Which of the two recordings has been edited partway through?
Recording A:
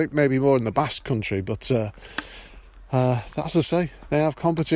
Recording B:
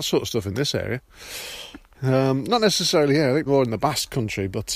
B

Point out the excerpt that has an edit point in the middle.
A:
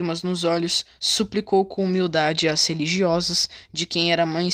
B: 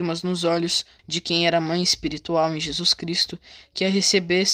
B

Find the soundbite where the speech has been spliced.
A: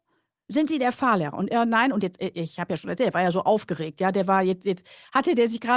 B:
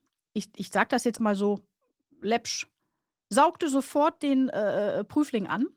B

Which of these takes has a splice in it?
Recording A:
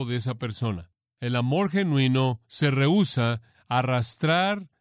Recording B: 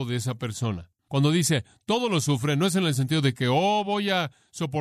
B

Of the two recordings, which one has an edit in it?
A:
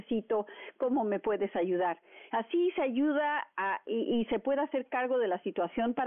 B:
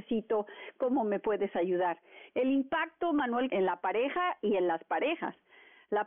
B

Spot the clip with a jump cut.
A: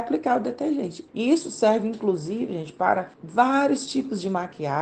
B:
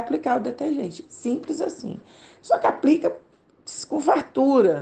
A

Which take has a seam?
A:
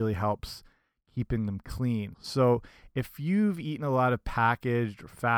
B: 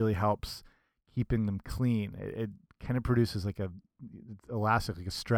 A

